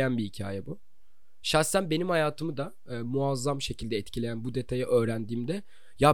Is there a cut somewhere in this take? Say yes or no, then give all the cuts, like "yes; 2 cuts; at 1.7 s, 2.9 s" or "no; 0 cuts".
no; 0 cuts